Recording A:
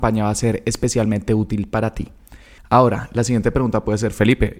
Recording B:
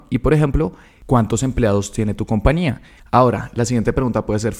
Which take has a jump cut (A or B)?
B